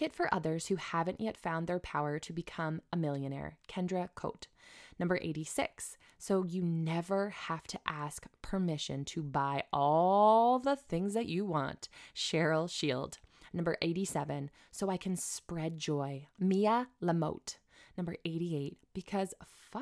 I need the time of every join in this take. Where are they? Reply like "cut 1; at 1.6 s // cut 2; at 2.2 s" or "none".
none